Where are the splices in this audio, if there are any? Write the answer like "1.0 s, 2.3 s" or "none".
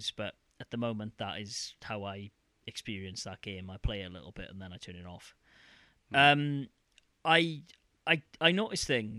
none